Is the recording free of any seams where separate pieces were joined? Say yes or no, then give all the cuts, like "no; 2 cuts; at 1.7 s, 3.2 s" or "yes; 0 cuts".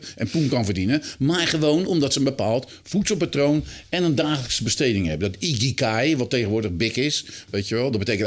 yes; 0 cuts